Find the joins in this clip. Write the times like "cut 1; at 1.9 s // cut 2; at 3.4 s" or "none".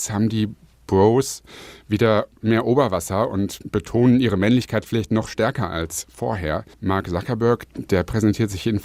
cut 1; at 6.7 s